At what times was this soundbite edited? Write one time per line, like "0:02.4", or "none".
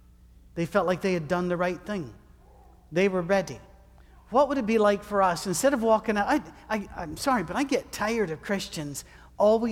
none